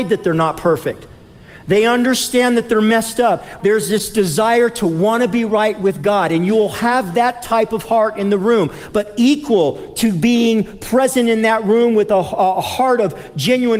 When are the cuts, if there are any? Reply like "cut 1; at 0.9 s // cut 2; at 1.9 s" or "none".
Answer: cut 1; at 3.6 s